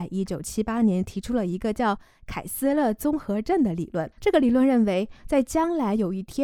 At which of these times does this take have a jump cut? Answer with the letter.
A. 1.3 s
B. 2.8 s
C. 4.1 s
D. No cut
C